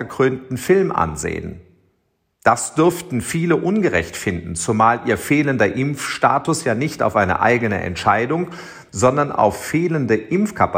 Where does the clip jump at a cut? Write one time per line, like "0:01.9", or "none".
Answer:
none

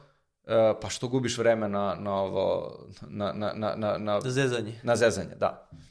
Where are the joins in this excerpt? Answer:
none

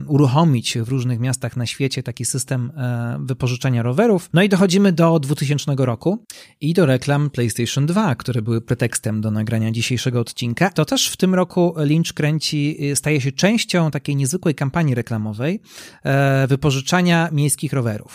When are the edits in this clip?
0:04.3
0:10.7

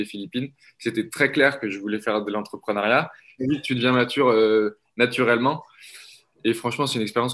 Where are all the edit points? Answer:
0:03.4

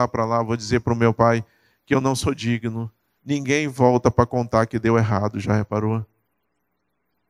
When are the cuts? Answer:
0:03.2

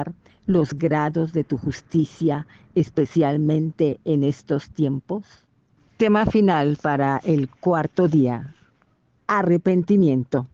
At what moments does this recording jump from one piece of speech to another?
0:05.8

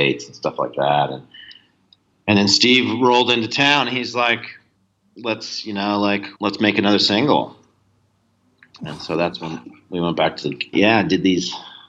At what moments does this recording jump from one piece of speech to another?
0:06.3
0:10.7

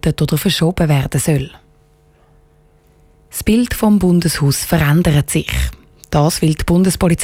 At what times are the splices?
none

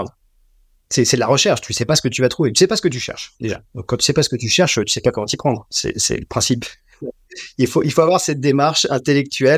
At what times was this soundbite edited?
none

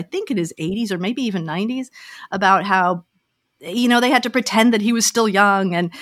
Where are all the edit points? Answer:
none

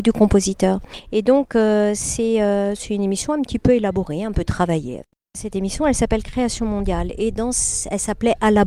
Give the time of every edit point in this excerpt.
none

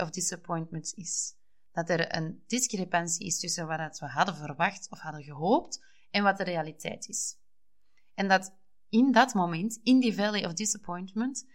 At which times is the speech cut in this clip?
none

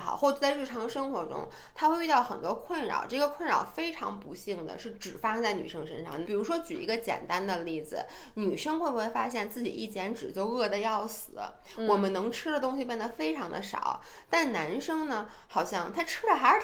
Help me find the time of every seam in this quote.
0:06.2

